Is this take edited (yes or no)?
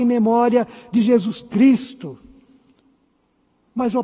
no